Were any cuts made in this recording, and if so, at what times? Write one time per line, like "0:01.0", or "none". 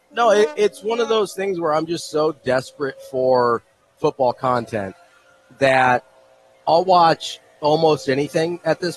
none